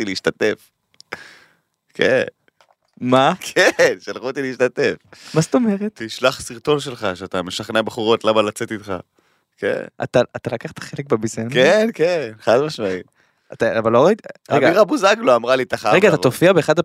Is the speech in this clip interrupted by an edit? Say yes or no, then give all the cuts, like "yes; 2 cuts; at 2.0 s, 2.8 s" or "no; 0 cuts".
no; 0 cuts